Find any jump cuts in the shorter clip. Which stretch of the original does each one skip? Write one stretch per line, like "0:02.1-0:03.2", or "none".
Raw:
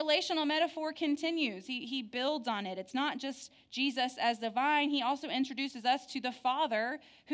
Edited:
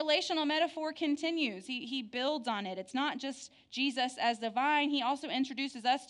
none